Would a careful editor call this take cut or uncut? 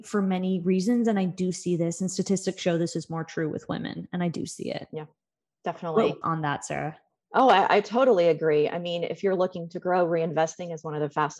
cut